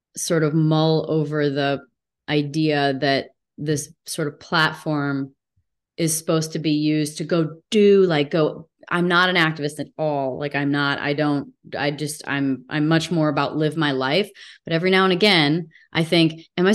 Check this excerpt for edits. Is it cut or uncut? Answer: uncut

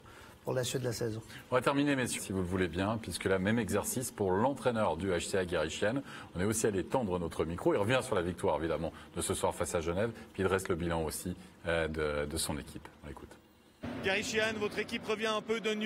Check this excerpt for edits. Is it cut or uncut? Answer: cut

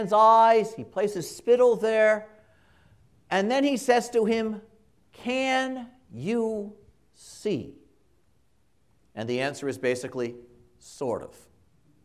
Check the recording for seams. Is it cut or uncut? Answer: uncut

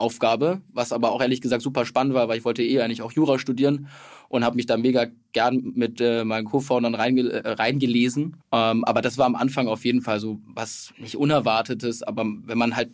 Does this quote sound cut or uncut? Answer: cut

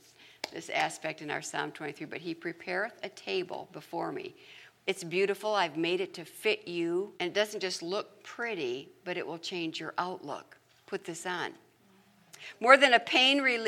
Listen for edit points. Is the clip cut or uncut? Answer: cut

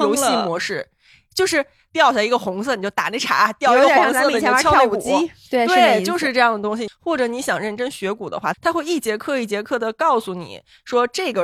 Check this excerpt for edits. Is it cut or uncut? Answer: cut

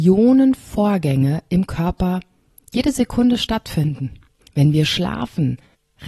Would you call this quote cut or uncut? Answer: cut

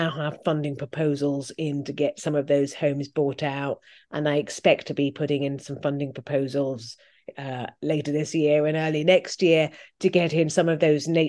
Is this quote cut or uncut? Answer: uncut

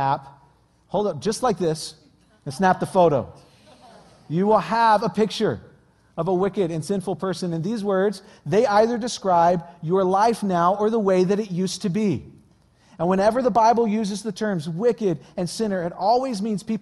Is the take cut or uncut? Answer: uncut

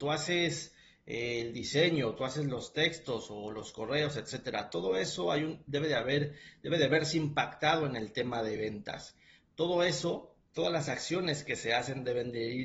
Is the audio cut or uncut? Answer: uncut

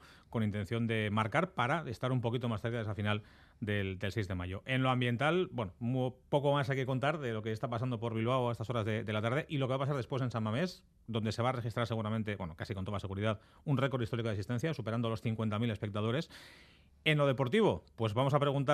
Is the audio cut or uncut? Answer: uncut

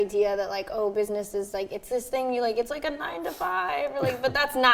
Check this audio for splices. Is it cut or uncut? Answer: uncut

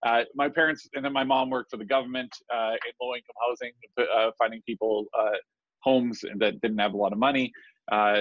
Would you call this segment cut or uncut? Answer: uncut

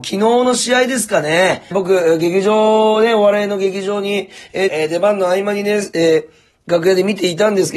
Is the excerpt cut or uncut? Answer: cut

